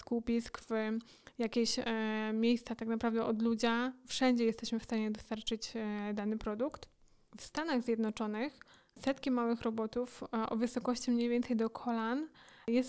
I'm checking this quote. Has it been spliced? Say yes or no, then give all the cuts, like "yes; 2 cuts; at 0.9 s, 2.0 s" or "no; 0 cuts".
no; 0 cuts